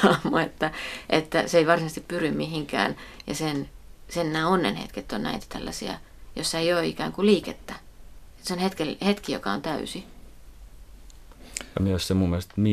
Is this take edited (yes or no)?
no